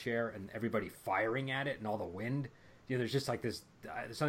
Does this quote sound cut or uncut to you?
uncut